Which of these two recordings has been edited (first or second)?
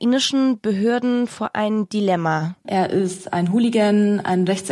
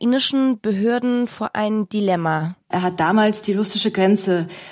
first